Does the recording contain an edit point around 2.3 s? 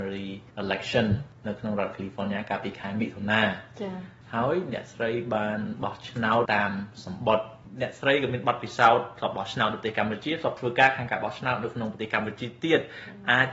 no; 1 cut; at 6.4 s

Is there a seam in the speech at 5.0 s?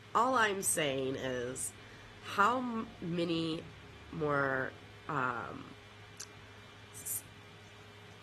no; 0 cuts

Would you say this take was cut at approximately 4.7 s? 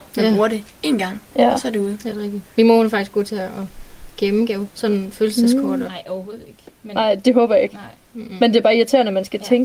yes; 2 cuts; at 4.7 s, 5.9 s

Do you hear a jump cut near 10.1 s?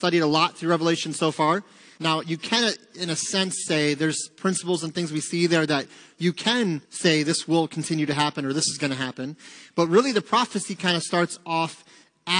no; 2 cuts; at 2.0 s, 6.8 s

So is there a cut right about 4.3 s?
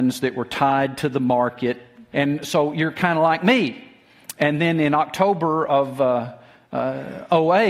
no; 1 cut; at 2.1 s

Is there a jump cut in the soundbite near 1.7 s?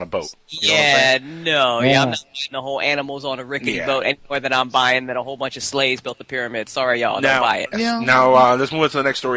no; 1 cut; at 7.7 s

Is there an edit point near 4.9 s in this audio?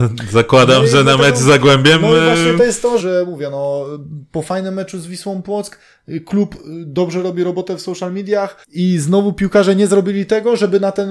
no; 2 cuts; at 3.0 s, 8.6 s

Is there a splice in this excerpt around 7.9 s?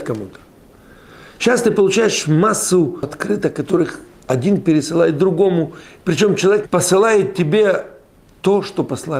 no; 1 cut; at 6.6 s

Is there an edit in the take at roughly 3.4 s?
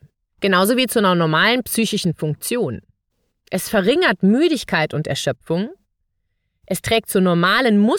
no; 0 cuts

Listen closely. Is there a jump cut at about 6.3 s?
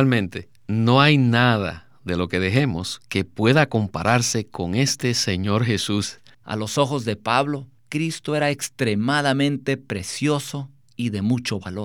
yes; 2 cuts; at 6.3 s, 7.8 s

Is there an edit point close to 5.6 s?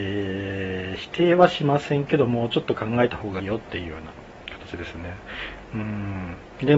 yes; 2 cuts; at 3.4 s, 5.6 s

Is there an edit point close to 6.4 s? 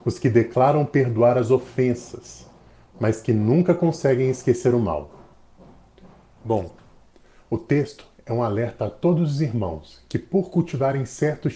yes; 1 cut; at 6.4 s

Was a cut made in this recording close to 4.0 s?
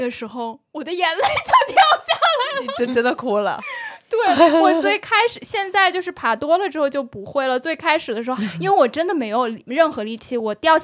no; 1 cut; at 8.4 s

